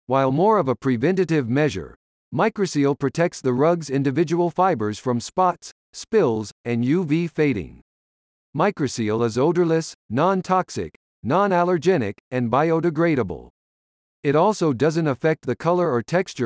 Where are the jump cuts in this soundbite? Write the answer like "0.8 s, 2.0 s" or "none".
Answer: none

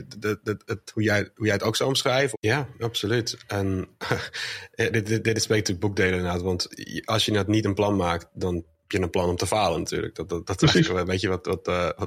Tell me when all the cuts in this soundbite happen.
2.3 s

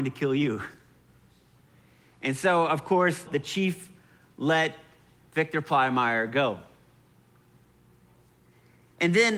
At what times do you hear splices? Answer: 3.3 s

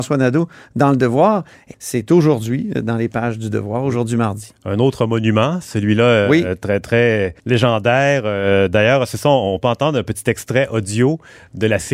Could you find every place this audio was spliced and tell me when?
1.7 s, 7.4 s

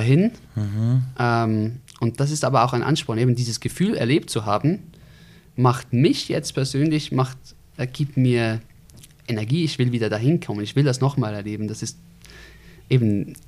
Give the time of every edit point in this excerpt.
none

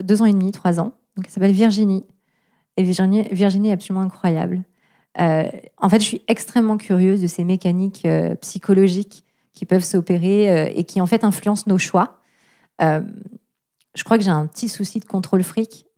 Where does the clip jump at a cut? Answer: none

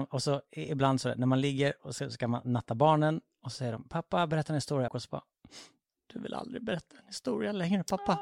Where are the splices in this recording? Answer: 4.9 s

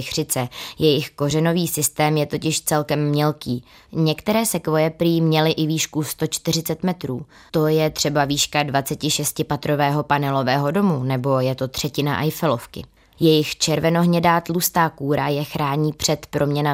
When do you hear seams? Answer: 3.9 s, 7.5 s, 13.2 s

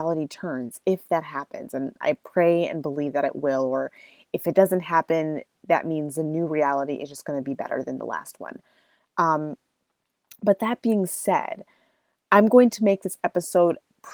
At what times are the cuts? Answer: none

